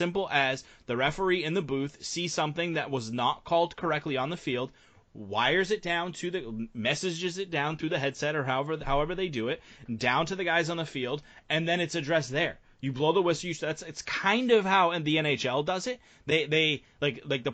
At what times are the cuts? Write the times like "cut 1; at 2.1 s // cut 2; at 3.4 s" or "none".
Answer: none